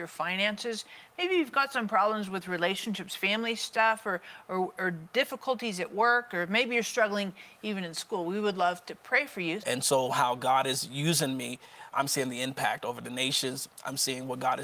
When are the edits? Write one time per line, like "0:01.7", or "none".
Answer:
0:09.6
0:11.9